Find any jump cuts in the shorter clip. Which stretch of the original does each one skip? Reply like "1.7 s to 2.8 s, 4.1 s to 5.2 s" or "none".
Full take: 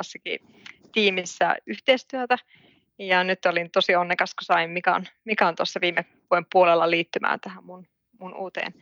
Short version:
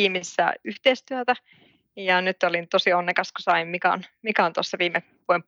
none